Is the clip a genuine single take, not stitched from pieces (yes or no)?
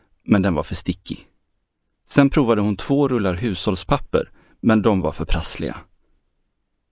yes